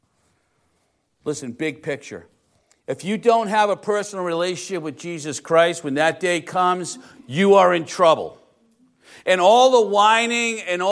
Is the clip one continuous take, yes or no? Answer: yes